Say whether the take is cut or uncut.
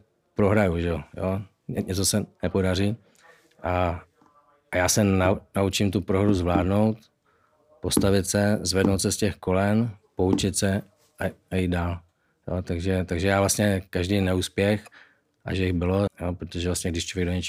cut